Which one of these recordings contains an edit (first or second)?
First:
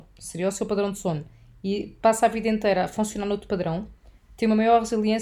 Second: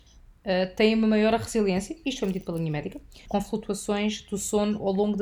second